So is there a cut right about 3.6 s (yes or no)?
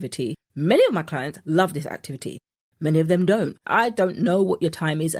yes